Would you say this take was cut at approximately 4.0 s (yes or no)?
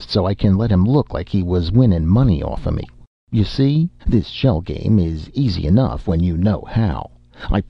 yes